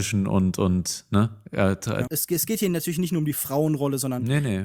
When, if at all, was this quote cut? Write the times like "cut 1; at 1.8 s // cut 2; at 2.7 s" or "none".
cut 1; at 2.1 s